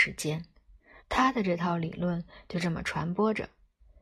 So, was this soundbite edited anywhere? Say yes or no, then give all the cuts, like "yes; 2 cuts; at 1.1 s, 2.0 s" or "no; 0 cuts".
yes; 1 cut; at 1.0 s